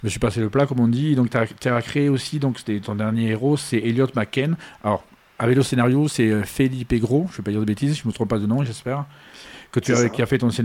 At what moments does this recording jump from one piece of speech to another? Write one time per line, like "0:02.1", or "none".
none